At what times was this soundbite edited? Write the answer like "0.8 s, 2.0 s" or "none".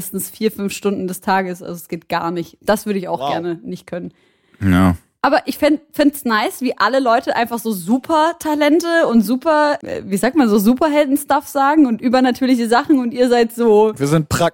9.8 s